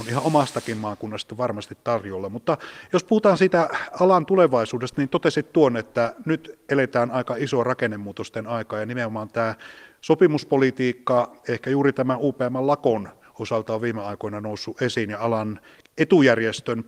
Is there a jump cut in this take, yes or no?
no